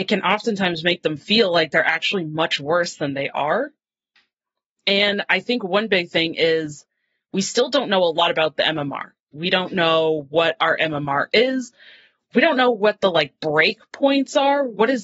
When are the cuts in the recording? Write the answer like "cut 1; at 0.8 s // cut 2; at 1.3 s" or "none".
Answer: cut 1; at 9.3 s